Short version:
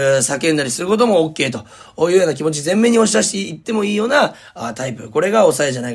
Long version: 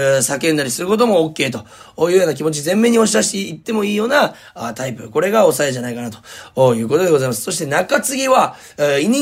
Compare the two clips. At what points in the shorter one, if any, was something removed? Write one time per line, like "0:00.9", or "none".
none